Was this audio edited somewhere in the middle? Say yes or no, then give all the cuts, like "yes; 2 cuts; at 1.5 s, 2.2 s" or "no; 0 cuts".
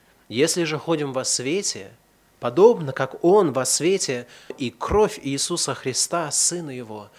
yes; 1 cut; at 4.5 s